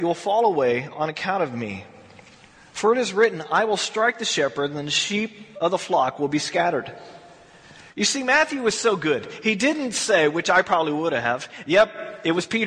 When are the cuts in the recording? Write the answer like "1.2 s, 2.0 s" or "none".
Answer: none